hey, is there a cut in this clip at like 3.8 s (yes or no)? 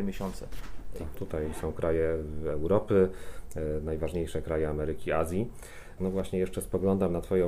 no